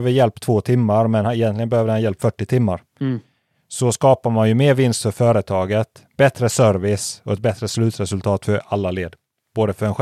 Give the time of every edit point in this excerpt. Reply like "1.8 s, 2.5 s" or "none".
none